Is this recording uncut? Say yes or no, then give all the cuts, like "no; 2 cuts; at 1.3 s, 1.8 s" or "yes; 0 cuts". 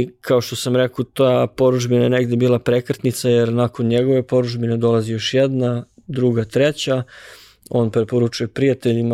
yes; 0 cuts